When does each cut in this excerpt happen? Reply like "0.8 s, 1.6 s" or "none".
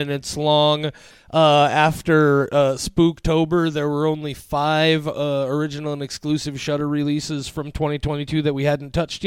1.1 s